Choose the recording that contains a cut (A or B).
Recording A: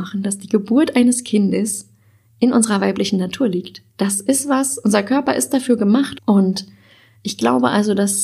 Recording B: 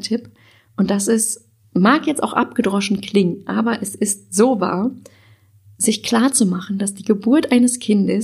A